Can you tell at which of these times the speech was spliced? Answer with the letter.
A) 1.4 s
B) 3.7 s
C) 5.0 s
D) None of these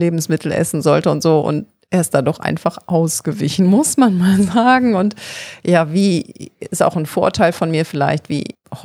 D